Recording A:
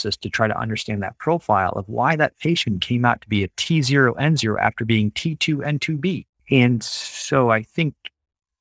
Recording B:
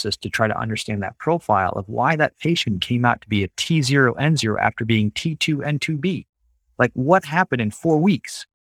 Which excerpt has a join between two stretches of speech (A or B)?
A